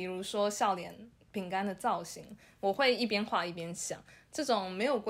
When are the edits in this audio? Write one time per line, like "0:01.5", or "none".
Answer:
none